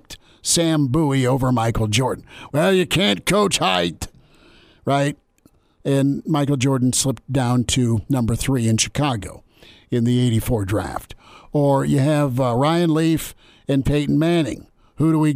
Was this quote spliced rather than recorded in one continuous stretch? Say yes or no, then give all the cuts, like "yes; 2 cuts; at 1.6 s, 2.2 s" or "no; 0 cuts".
no; 0 cuts